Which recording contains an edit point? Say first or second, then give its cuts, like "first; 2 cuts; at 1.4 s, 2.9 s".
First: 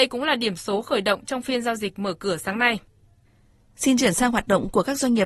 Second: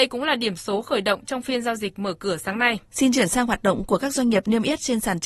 second; 1 cut; at 2.9 s